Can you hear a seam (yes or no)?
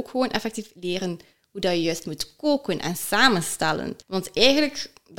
yes